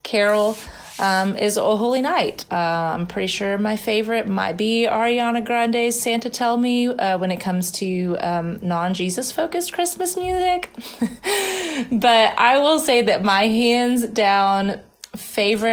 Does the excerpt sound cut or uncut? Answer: cut